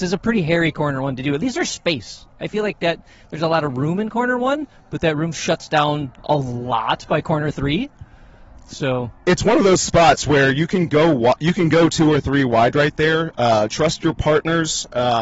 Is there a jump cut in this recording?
no; 0 cuts

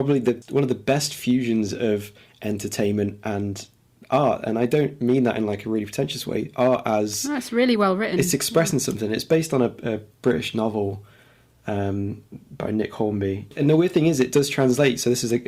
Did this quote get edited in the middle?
no; 0 cuts

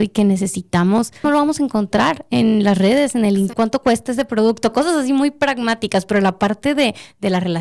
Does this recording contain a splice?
yes; 2 cuts; at 1.2 s, 3.5 s

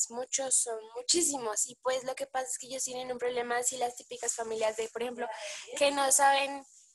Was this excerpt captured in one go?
yes; 0 cuts

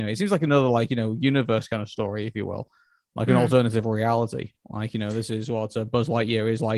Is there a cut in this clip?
no; 0 cuts

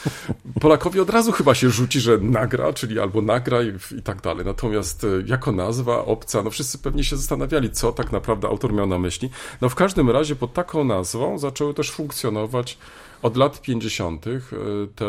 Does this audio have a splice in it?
no; 0 cuts

